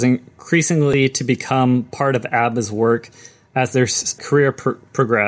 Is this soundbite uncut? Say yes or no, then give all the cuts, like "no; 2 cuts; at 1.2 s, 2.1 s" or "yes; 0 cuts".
no; 1 cut; at 4.2 s